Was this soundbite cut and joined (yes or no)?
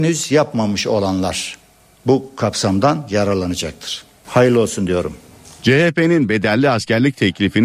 no